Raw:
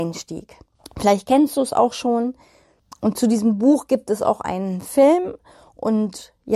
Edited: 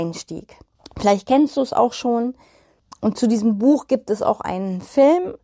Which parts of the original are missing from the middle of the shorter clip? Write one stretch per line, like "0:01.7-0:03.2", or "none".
none